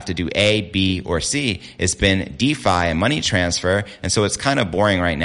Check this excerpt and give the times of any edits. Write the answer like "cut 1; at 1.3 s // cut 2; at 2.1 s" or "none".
none